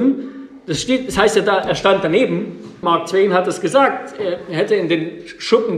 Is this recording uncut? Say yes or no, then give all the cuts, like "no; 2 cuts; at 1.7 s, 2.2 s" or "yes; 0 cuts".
no; 1 cut; at 2.8 s